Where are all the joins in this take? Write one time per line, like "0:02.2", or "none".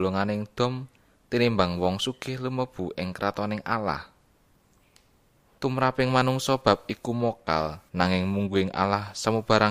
0:05.6
0:07.9

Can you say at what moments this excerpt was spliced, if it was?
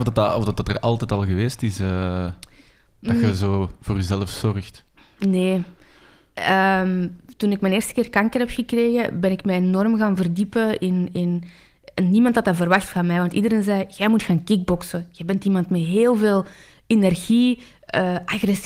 none

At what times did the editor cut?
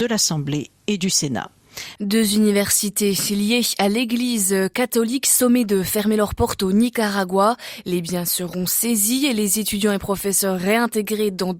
0:02.0

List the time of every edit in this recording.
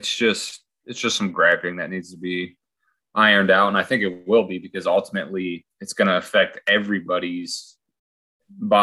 none

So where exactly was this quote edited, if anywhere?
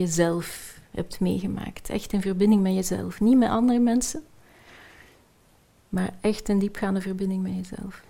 none

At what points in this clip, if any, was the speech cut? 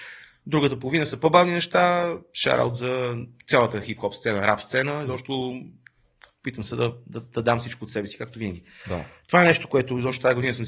none

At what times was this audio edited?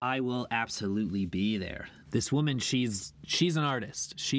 0:02.0

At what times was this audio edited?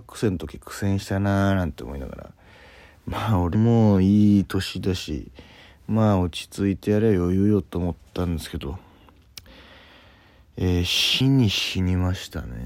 0:03.5
0:11.2

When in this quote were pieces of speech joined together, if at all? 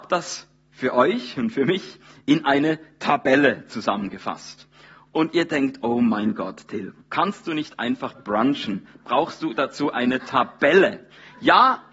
none

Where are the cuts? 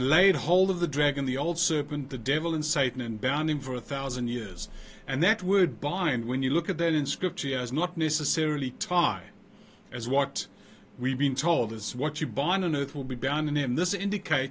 none

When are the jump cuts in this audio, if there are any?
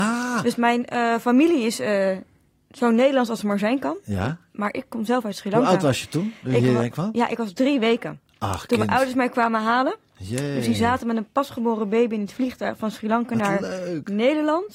none

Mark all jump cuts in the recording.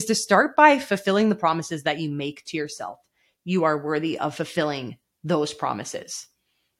0:03.4

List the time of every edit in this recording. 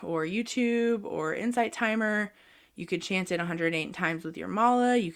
none

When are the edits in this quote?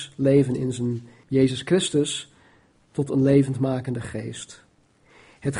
0:01.2

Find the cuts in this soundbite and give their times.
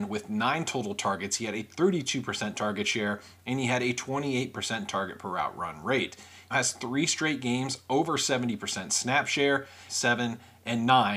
0:06.5
0:09.9

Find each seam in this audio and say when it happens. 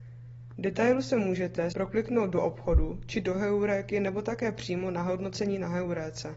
0:01.7

